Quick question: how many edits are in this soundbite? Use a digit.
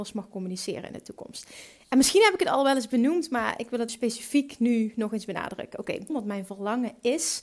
2